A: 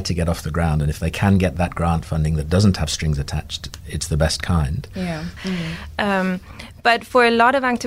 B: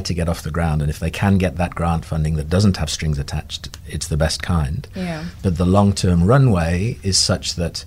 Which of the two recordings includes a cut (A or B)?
A